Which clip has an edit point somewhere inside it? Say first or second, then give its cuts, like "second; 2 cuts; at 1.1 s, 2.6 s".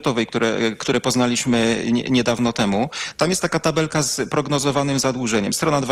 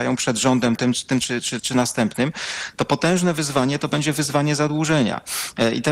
second; 1 cut; at 1.6 s